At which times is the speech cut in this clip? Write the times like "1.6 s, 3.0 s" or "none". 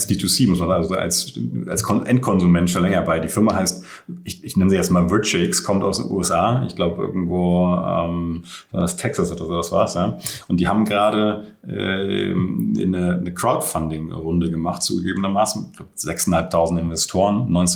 none